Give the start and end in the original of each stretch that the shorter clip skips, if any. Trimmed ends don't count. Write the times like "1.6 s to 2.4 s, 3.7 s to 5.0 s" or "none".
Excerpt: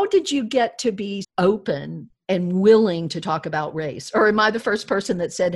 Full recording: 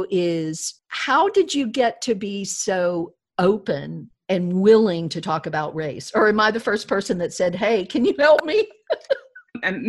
2.5 s to 3.2 s